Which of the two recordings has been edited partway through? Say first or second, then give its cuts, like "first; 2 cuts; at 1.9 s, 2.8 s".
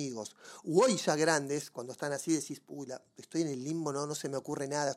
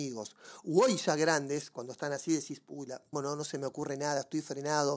second; 1 cut; at 3.1 s